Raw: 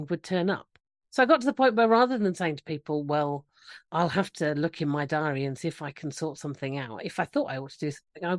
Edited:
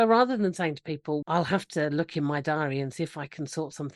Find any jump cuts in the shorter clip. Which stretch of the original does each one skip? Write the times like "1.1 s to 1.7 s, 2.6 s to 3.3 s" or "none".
3.0 s to 3.9 s